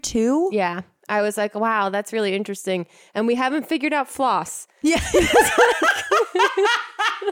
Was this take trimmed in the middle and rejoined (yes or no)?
no